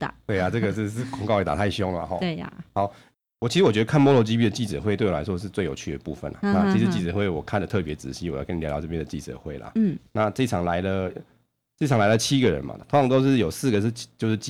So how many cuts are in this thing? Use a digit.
0